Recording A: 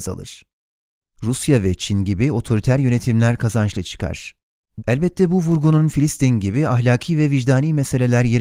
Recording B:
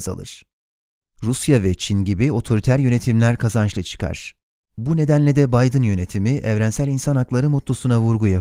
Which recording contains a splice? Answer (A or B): A